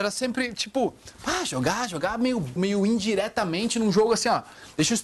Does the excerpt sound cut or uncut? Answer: cut